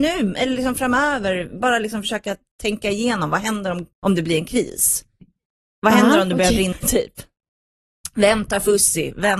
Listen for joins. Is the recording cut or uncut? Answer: cut